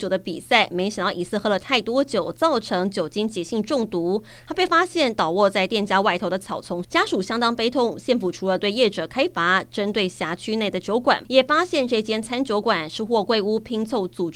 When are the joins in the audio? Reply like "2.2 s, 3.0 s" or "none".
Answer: 6.8 s, 11.2 s